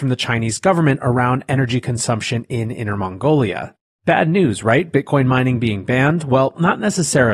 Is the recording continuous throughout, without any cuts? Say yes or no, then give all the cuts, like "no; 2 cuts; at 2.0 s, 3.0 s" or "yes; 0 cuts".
yes; 0 cuts